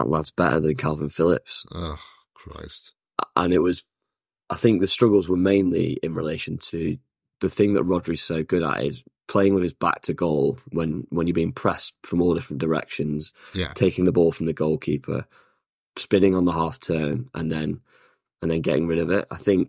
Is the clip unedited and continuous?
yes; 0 cuts

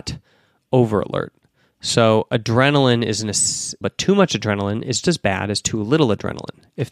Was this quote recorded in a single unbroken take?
no; 2 cuts; at 3.8 s, 5.0 s

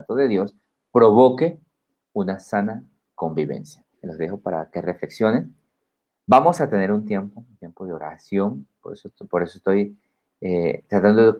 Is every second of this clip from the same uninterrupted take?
yes; 0 cuts

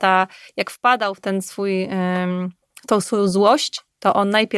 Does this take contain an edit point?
no; 0 cuts

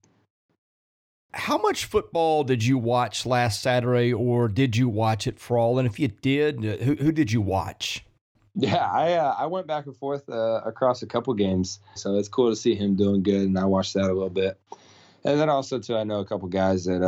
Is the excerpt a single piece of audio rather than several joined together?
no; 1 cut; at 12.0 s

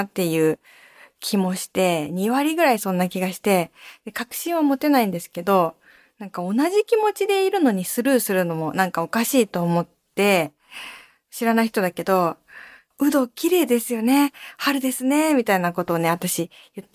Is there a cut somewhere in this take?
no; 0 cuts

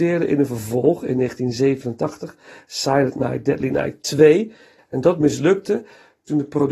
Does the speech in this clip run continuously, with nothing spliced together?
no; 1 cut; at 4.8 s

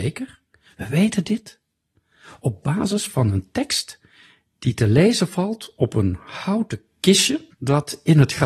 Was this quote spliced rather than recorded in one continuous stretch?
yes; 1 cut; at 7.5 s

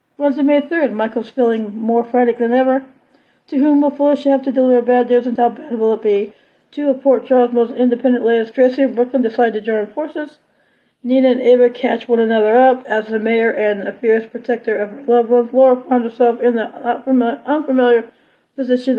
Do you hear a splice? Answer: yes; 1 cut; at 5.4 s

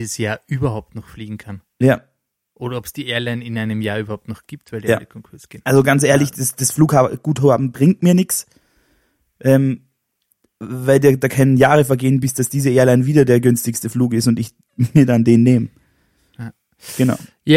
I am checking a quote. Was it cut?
no; 0 cuts

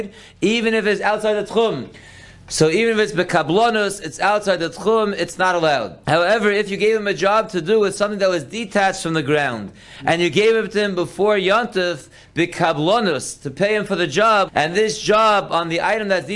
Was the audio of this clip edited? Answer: yes; 2 cuts; at 6.0 s, 14.5 s

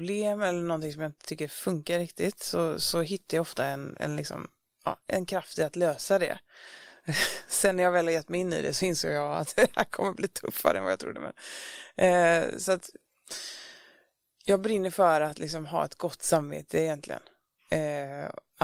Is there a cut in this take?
no; 0 cuts

